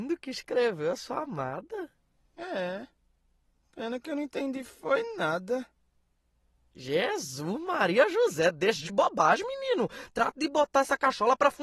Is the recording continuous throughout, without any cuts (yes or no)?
yes